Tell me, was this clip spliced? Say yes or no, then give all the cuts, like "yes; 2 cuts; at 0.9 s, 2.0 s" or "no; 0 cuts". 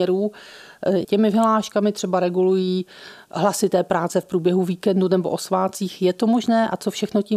yes; 1 cut; at 1.0 s